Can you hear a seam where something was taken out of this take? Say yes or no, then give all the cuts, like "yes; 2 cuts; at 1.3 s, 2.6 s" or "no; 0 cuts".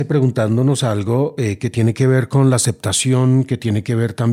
no; 0 cuts